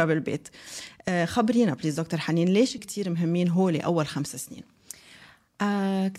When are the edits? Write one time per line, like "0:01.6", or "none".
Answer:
0:02.8